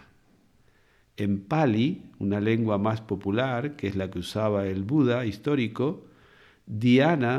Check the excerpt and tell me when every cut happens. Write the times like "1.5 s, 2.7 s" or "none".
none